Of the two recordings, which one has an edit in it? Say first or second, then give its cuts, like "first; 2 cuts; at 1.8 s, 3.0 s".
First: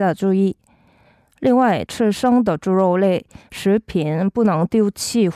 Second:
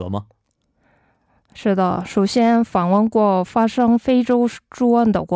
first; 1 cut; at 1.9 s